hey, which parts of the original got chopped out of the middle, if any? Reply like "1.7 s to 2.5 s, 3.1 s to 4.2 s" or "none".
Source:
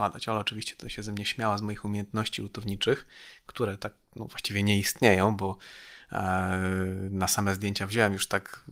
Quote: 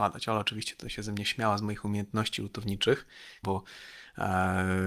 3.4 s to 5.4 s